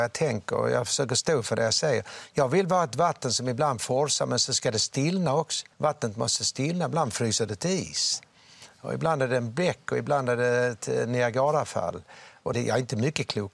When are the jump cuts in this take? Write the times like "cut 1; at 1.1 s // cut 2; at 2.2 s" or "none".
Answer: cut 1; at 5.7 s // cut 2; at 12.5 s